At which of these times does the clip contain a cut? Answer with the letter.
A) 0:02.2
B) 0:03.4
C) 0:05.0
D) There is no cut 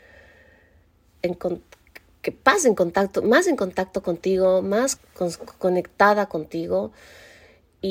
C